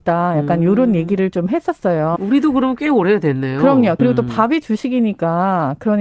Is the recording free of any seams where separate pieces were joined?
no; 2 cuts; at 2.2 s, 4.0 s

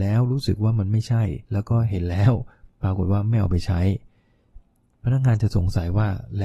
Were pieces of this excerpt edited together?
yes; 1 cut; at 1.4 s

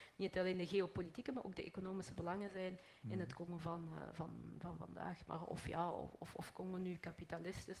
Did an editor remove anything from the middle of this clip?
no; 0 cuts

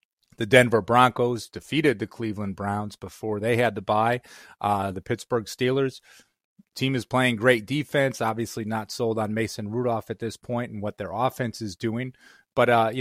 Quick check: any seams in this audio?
no; 0 cuts

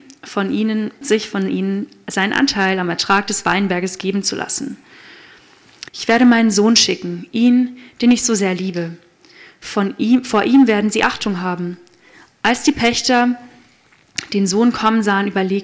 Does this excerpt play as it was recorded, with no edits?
no; 2 cuts; at 1.0 s, 5.9 s

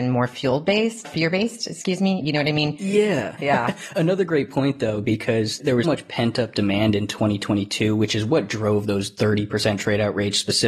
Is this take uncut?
no; 2 cuts; at 3.4 s, 5.8 s

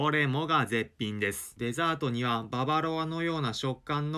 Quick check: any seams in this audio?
no; 0 cuts

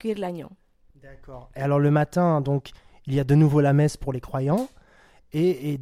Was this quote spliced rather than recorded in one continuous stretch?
no; 0 cuts

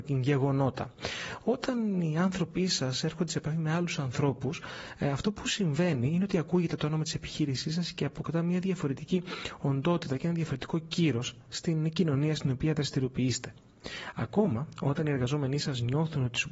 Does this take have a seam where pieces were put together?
no; 0 cuts

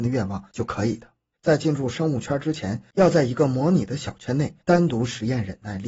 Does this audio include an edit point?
yes; 1 cut; at 1.3 s

